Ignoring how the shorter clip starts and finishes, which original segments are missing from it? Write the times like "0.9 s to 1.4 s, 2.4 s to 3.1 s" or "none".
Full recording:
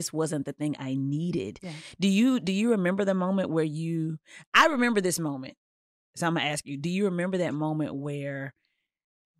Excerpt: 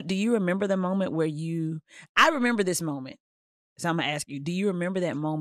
none

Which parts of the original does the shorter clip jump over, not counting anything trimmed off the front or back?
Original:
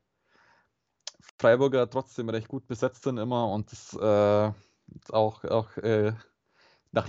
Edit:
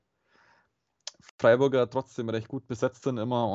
none

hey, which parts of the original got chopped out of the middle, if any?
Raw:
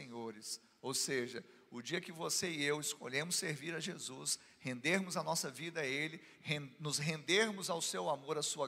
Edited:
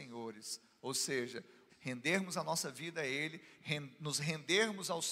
1.7 s to 4.5 s

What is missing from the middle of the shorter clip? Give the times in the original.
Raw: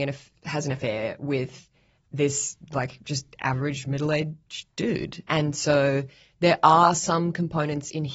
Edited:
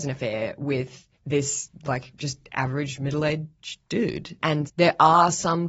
1.8 s to 2.0 s, 5.5 s to 6.3 s

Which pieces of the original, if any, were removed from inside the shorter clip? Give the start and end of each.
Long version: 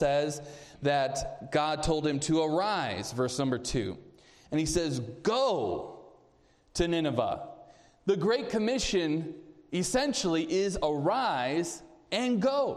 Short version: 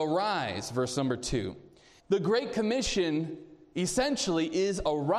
4.4 s to 8.0 s

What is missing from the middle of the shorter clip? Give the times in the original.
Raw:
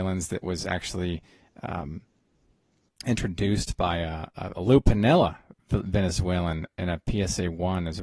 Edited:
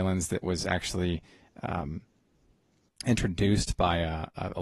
none

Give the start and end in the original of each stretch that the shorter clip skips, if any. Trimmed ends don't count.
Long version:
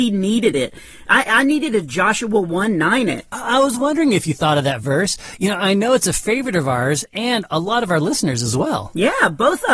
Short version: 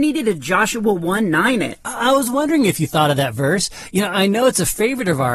none

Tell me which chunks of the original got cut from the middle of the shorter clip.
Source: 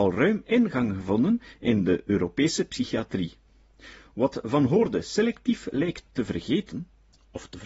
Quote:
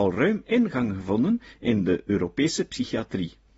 none

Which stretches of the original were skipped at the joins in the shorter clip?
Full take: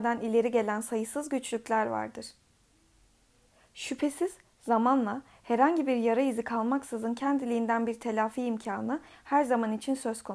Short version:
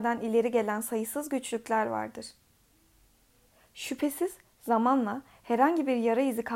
none

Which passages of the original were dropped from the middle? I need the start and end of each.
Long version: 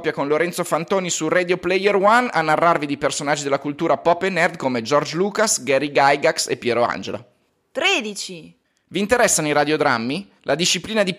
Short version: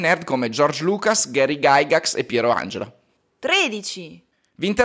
none

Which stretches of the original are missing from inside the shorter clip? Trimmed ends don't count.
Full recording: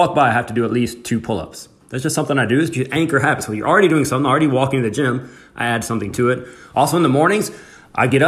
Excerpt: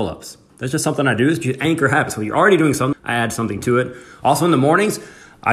4.2 s to 5.4 s

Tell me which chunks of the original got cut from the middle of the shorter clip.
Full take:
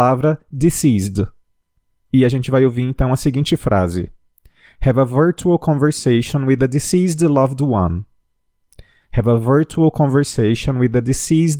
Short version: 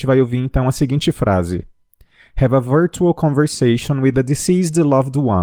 none

